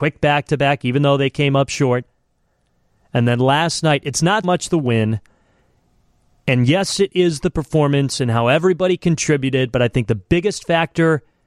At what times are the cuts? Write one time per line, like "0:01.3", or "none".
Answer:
0:04.4